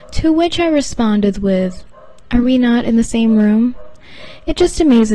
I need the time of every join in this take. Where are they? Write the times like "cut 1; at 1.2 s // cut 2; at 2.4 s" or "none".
none

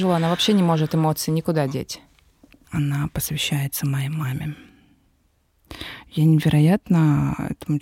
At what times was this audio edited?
cut 1; at 2.6 s

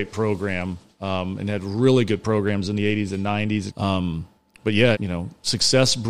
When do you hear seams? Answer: cut 1; at 3.7 s // cut 2; at 4.9 s

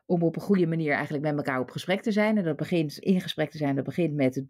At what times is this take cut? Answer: cut 1; at 3.0 s

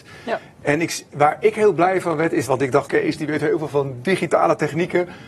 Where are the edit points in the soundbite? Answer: cut 1; at 2.9 s

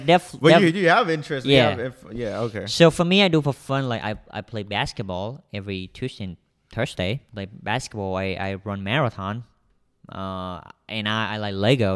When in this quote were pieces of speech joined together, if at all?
cut 1; at 7.3 s

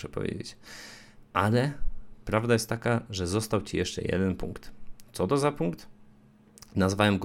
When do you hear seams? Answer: none

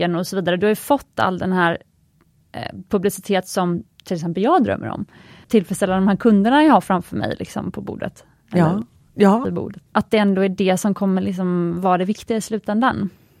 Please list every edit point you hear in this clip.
cut 1; at 5.4 s // cut 2; at 9.9 s

